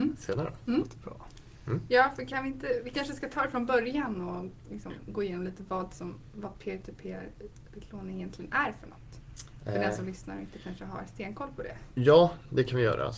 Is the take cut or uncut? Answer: uncut